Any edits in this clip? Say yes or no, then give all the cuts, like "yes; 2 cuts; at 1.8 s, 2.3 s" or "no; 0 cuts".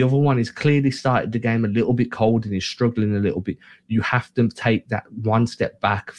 no; 0 cuts